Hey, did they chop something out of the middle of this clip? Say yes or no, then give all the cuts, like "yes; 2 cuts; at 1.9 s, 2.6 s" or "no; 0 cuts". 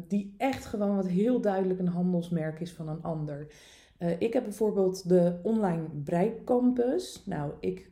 no; 0 cuts